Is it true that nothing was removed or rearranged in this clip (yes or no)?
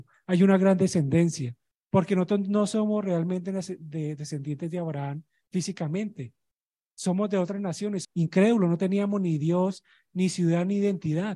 no